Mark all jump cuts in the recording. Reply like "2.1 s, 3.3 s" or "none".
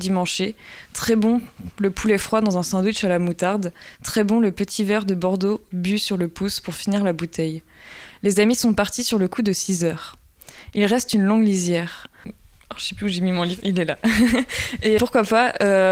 12.2 s, 15.0 s